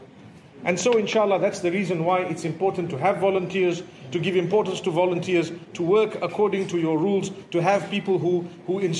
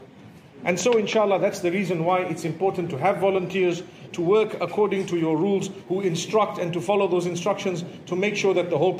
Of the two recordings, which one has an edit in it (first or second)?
second